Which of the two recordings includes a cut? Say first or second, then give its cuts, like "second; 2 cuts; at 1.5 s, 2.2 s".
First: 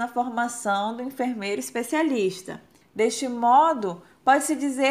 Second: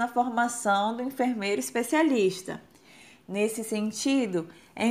first; 1 cut; at 2.8 s